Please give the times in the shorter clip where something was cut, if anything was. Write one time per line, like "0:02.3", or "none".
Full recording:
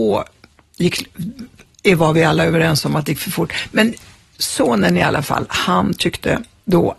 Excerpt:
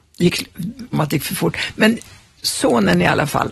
0:00.9